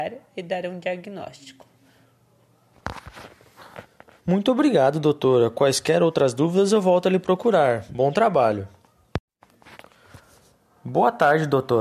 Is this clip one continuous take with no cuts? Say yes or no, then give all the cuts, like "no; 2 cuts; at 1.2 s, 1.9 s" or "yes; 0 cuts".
yes; 0 cuts